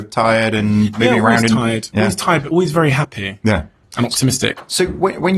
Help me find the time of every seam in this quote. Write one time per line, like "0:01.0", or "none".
none